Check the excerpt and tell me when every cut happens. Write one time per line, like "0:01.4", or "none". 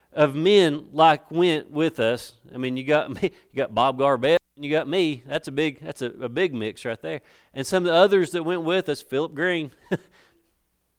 none